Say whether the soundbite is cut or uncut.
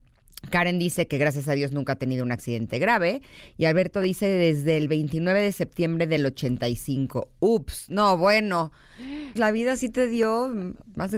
cut